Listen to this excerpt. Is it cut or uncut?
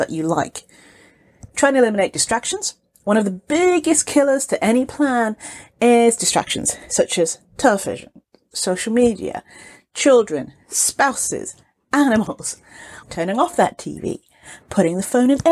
cut